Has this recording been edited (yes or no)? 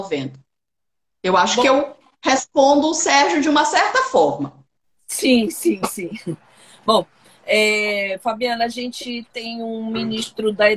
no